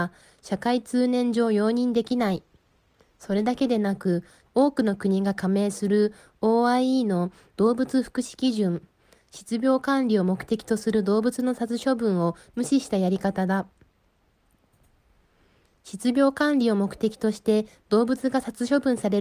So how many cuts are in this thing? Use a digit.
1